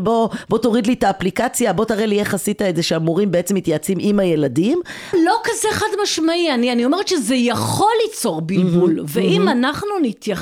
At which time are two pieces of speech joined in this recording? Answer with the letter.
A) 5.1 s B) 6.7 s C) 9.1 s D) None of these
A